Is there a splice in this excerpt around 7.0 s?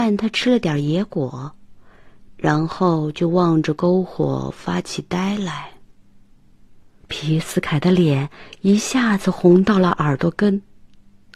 yes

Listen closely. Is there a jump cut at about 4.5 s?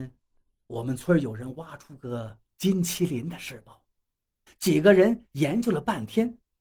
yes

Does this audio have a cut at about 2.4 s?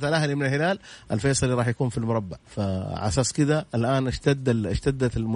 yes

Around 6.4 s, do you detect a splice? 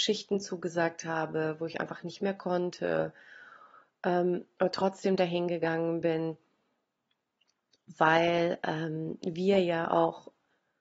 no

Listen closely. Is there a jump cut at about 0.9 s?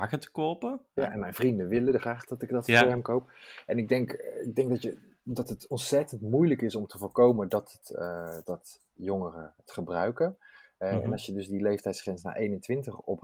no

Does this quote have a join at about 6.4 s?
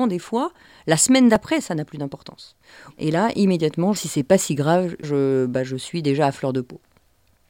no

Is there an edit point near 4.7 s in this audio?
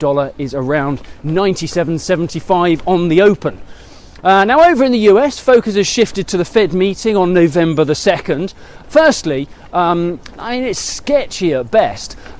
no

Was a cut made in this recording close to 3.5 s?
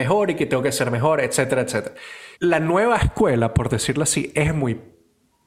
no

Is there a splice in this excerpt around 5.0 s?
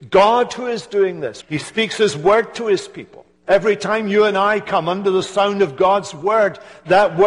no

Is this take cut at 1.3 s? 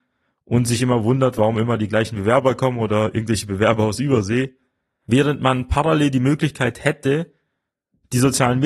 no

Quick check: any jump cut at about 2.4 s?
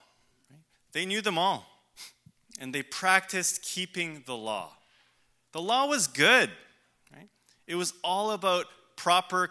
no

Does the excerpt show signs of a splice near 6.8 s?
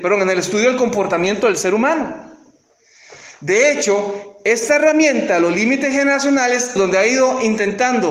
yes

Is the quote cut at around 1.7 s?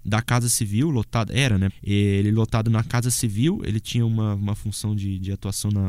yes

